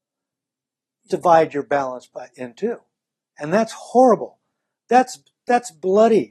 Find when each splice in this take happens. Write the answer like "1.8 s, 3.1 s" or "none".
1.1 s